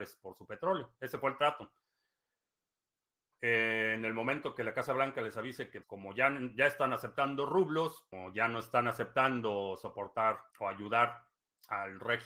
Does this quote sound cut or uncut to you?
cut